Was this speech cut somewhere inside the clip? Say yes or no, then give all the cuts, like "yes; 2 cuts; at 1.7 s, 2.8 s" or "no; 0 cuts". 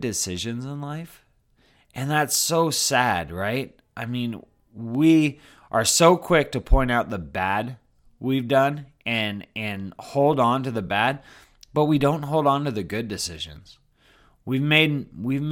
no; 0 cuts